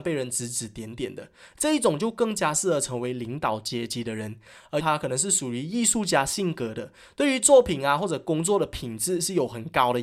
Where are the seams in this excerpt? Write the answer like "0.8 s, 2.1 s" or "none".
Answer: 4.8 s